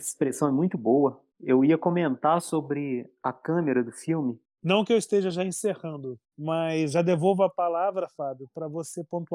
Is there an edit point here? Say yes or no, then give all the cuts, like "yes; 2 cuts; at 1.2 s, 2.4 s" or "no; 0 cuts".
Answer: yes; 3 cuts; at 1.3 s, 4.4 s, 6.2 s